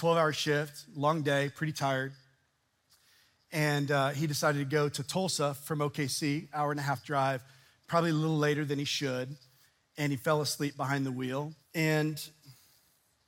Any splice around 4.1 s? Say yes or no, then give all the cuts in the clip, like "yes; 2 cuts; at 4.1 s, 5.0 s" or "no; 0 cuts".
no; 1 cut; at 11.6 s